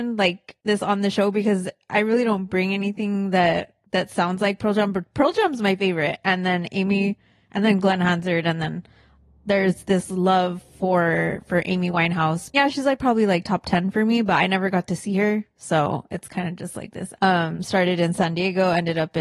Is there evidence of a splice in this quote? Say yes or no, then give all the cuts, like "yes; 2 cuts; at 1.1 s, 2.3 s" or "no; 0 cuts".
yes; 2 cuts; at 12.5 s, 17.2 s